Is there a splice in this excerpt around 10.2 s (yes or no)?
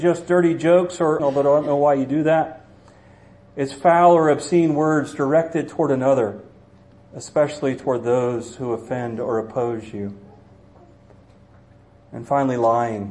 no